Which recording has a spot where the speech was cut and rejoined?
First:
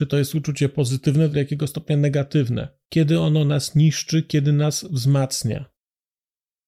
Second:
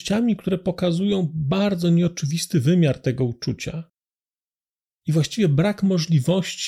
first; 2 cuts; at 1.3 s, 2.8 s

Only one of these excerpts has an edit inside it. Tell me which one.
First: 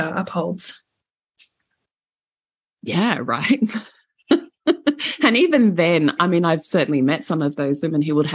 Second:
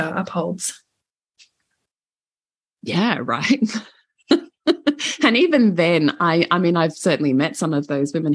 first; 1 cut; at 6.2 s

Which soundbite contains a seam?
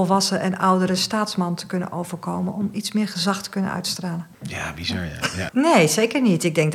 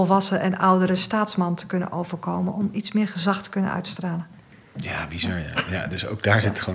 first; 2 cuts; at 4.3 s, 5.5 s

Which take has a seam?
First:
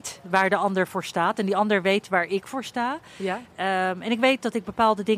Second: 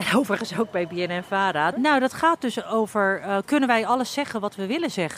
second; 1 cut; at 1.7 s

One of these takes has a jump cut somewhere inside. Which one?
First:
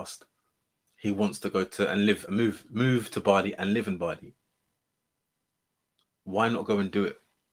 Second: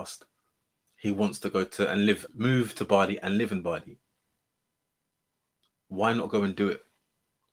second; 1 cut; at 2.3 s

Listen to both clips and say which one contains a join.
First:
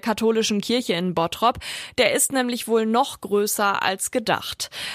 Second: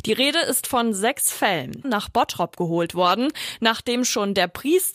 second; 1 cut; at 1.8 s

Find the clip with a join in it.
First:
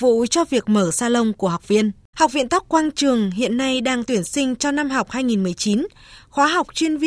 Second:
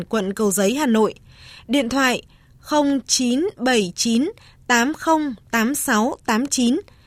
first; 1 cut; at 2.1 s

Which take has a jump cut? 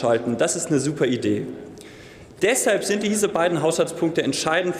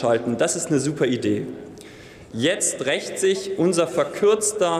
second; 1 cut; at 2.3 s

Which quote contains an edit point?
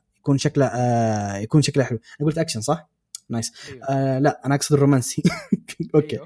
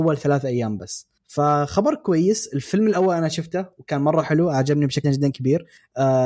second; 1 cut; at 5.0 s

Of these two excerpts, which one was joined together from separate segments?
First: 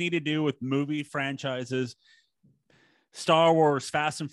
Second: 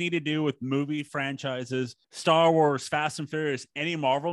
second; 1 cut; at 2.0 s

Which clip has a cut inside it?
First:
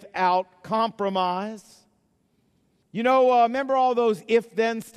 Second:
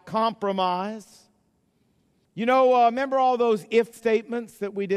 second; 1 cut; at 3.9 s

